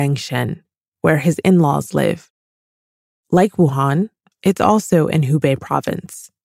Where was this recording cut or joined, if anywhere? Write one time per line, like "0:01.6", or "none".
none